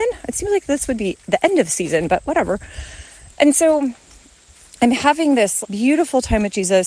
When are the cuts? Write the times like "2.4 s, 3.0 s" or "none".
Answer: 3.3 s, 5.6 s